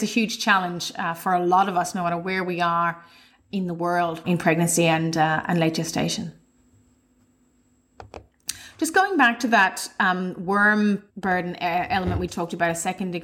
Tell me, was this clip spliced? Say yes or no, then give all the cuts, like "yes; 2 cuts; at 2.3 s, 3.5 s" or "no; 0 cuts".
yes; 3 cuts; at 4.2 s, 11.1 s, 12.3 s